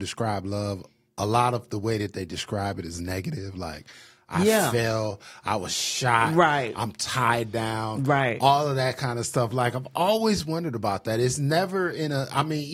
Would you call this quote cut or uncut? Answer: uncut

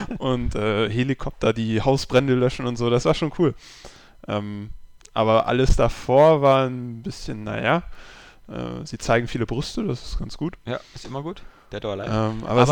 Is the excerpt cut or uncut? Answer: uncut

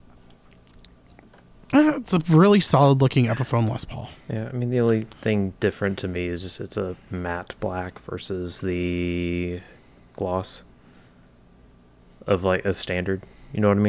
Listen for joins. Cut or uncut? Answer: uncut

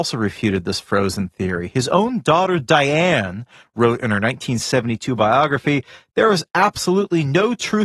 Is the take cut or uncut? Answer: uncut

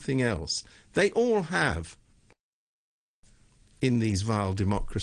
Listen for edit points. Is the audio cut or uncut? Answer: uncut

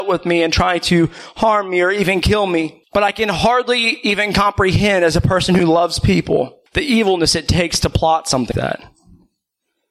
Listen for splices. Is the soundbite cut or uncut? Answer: cut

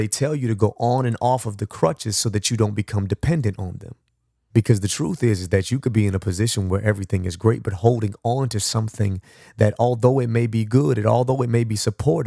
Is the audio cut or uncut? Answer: cut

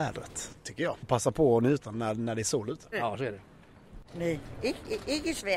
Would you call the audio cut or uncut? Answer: cut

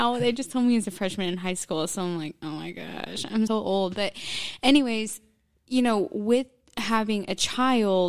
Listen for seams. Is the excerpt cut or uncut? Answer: cut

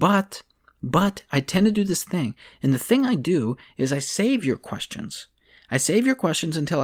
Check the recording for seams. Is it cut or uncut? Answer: uncut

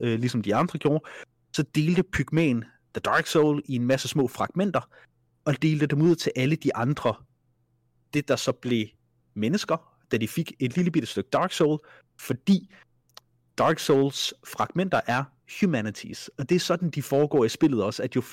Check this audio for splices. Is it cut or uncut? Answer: uncut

